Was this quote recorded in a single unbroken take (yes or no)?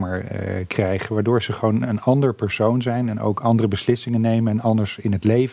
yes